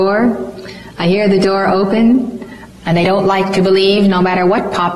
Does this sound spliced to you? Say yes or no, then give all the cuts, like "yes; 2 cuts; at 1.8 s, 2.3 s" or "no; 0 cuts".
yes; 1 cut; at 2.7 s